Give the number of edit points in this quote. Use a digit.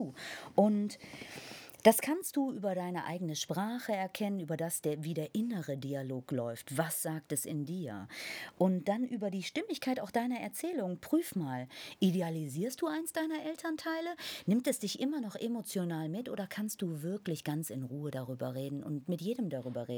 0